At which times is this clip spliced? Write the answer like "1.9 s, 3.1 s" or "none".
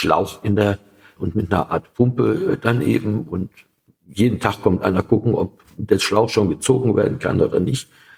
1.2 s